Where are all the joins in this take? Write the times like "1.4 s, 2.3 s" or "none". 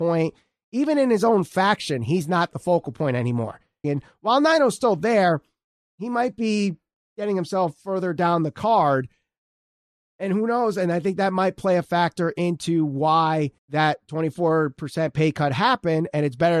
3.8 s, 13.6 s